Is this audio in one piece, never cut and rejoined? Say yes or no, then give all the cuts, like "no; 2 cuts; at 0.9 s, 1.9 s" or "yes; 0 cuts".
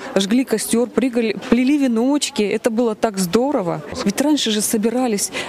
no; 2 cuts; at 1.4 s, 4.0 s